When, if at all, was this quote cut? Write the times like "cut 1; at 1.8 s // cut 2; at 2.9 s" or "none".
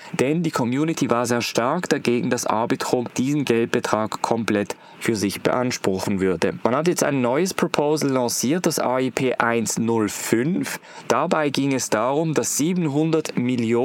none